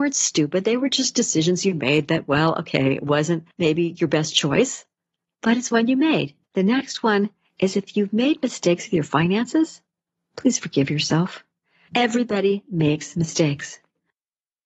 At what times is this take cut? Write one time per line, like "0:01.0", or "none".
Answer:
0:06.4